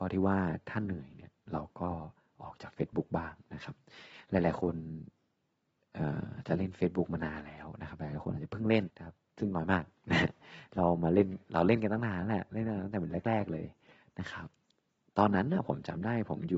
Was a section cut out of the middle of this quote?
yes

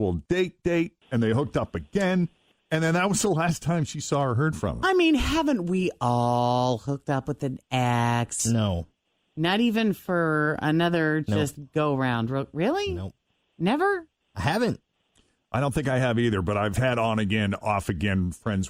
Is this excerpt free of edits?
yes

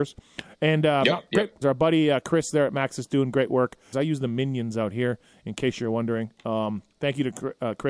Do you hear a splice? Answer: yes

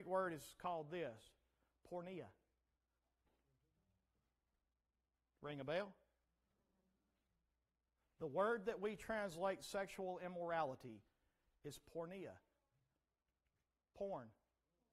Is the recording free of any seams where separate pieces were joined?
yes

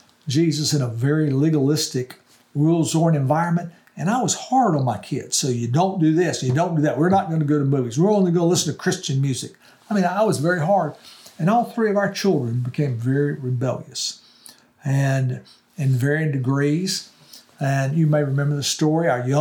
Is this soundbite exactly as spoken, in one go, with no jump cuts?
yes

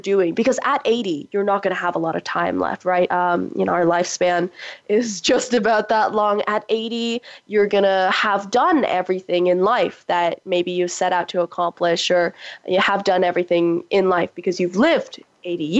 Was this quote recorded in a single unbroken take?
yes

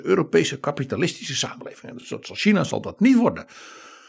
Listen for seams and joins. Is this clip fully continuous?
yes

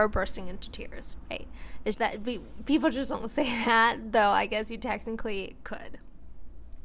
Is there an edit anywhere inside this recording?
yes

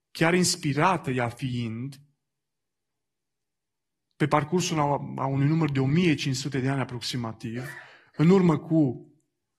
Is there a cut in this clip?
no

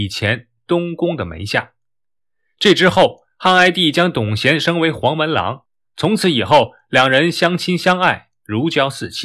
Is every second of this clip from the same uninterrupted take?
yes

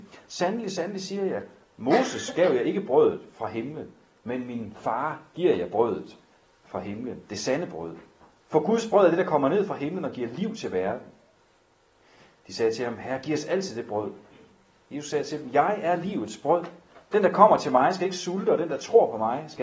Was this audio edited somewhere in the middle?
no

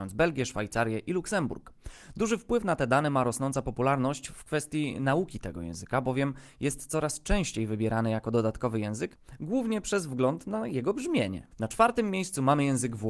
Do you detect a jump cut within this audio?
no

